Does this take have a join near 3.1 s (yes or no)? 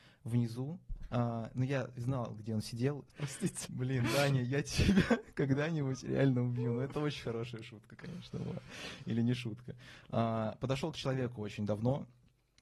yes